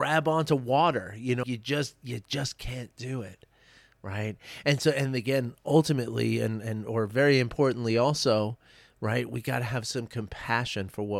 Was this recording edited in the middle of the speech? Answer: yes; 1 cut; at 1.4 s

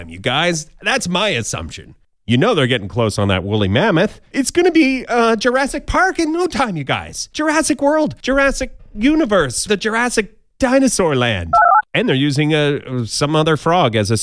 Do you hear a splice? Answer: yes; 2 cuts; at 9.7 s, 11.8 s

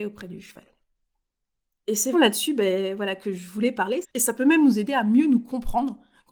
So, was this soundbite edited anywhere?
yes; 2 cuts; at 2.1 s, 4.0 s

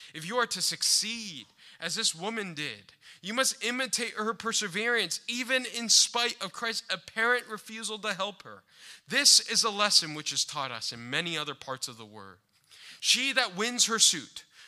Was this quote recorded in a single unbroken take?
yes; 0 cuts

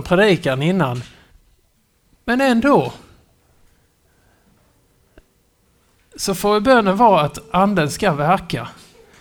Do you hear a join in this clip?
no; 0 cuts

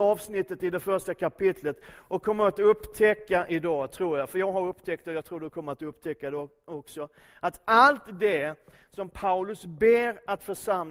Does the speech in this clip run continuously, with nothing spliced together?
yes; 0 cuts

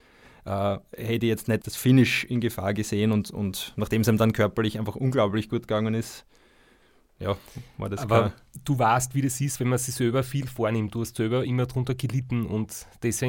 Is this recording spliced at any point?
yes; 1 cut; at 1.6 s

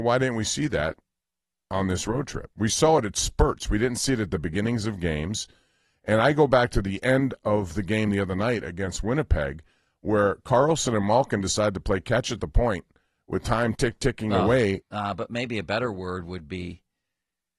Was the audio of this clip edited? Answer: yes; 2 cuts; at 13.8 s, 14.8 s

